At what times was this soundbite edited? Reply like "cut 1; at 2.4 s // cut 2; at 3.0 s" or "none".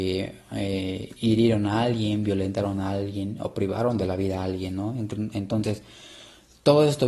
none